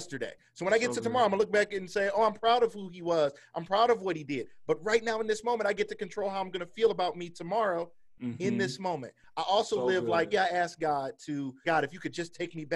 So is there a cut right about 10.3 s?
yes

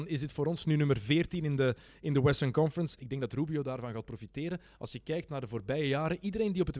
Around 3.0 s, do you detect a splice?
yes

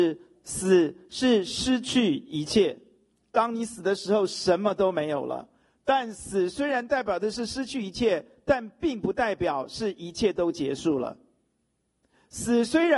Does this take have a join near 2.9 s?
no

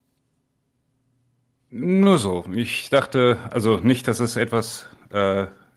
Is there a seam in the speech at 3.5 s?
no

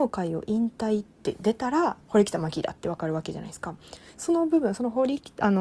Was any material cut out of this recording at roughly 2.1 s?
yes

